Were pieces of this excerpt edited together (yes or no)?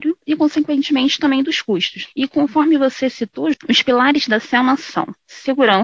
yes